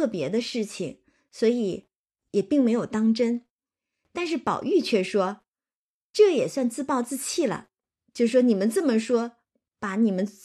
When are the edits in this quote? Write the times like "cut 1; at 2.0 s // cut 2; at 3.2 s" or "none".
none

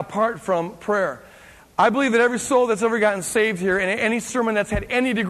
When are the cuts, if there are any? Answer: none

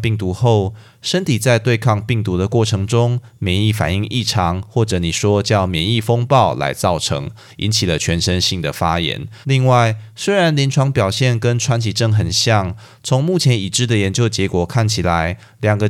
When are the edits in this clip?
cut 1; at 9.4 s

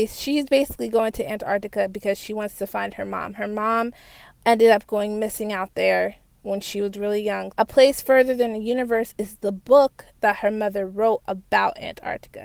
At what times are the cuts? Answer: cut 1; at 7.5 s

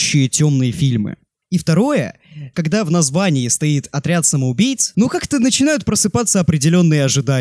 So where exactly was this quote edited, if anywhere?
cut 1; at 1.4 s // cut 2; at 2.5 s // cut 3; at 4.9 s

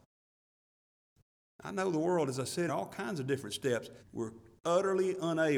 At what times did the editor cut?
cut 1; at 2.7 s // cut 2; at 4.0 s

